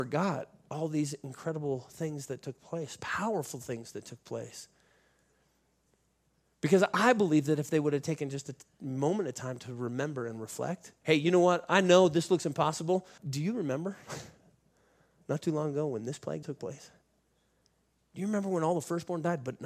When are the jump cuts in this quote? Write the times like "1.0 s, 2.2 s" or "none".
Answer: 11.0 s, 13.2 s, 16.4 s